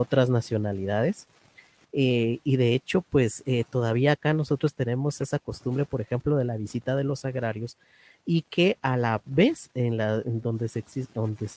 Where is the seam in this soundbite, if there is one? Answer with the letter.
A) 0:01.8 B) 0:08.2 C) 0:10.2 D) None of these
A